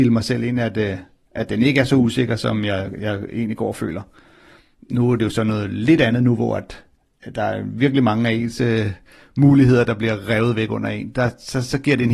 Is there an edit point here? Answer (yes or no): no